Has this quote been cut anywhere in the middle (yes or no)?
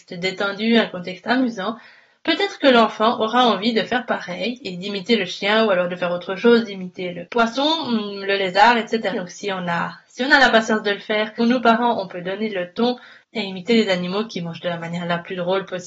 yes